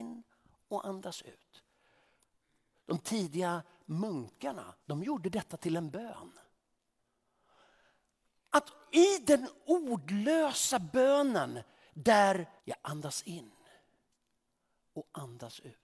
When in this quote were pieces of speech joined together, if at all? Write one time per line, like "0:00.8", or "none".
0:04.8
0:12.6